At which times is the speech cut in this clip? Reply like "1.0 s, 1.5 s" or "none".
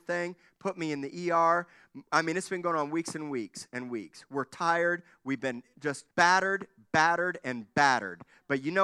6.1 s